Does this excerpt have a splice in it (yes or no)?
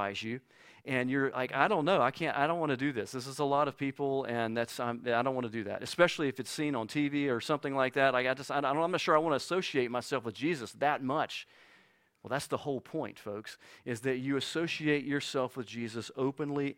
no